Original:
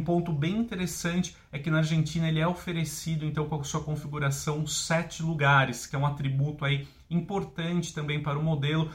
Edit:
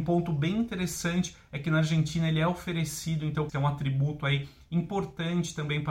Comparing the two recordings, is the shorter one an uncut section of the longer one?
no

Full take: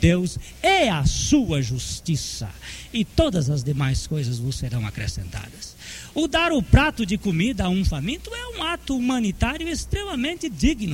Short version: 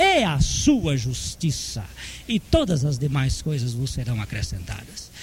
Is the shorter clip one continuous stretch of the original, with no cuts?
yes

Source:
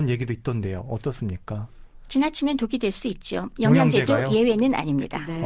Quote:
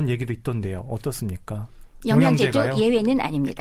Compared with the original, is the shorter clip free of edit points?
no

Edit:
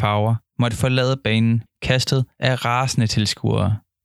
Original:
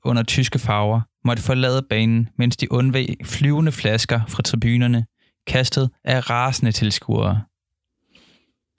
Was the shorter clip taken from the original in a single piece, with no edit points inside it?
no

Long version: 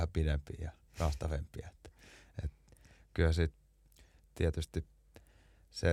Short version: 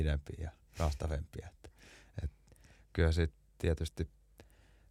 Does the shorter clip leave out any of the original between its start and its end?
yes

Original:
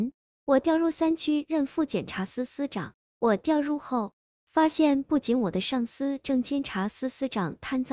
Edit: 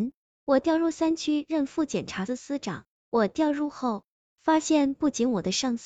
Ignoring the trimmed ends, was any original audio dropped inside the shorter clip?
yes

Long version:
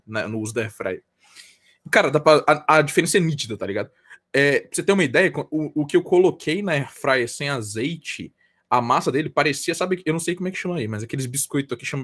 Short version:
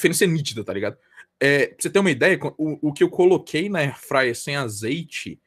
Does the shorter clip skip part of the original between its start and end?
no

